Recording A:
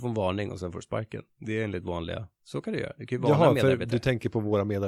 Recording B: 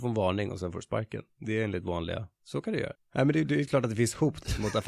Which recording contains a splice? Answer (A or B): B